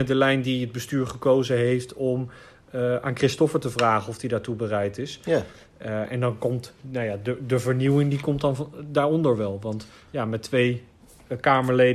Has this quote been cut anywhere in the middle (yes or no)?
no